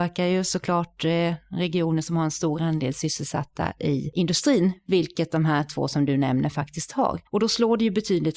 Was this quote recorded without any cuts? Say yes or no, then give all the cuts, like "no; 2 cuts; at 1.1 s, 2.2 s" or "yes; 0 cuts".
no; 1 cut; at 7.3 s